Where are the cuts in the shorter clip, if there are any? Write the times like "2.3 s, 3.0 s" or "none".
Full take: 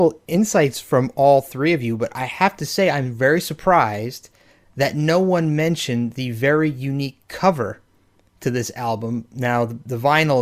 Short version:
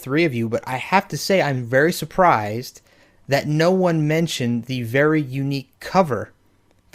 none